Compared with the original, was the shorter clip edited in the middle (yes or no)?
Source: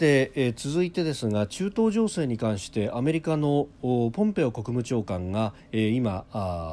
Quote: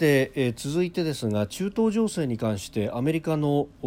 no